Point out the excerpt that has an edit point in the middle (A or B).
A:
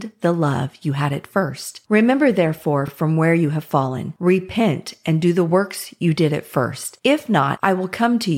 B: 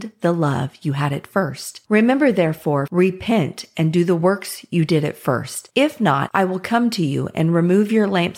B